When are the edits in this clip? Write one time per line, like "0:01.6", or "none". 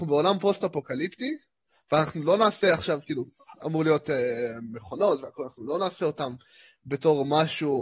0:03.6